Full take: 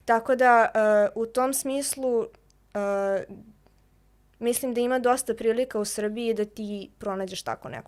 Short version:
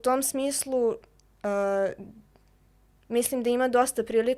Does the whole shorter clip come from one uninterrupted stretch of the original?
yes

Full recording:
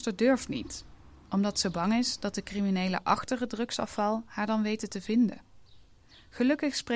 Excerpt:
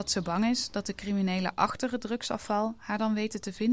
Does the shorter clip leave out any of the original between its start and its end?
no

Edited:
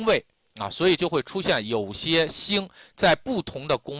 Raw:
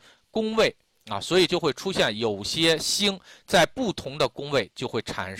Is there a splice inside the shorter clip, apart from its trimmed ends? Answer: no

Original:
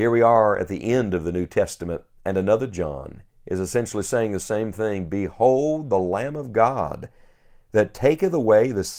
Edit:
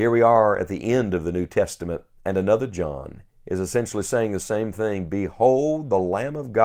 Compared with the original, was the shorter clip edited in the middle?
no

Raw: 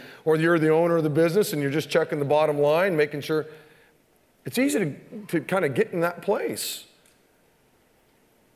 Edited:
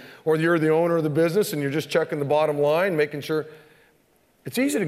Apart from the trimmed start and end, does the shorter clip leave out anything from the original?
no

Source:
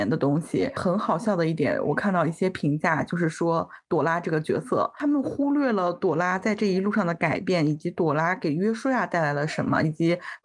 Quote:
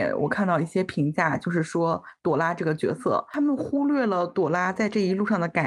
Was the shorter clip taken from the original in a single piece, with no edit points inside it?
yes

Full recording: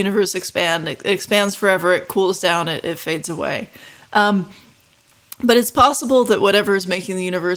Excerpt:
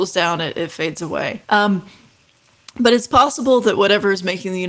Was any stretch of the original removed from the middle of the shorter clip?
yes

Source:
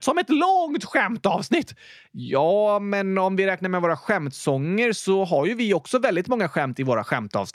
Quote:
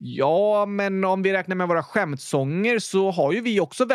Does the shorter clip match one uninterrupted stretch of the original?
yes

